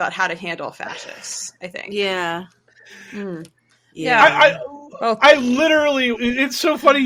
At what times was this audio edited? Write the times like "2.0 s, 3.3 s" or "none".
6.1 s